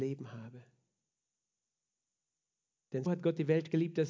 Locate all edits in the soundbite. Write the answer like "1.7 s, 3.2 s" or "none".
3.1 s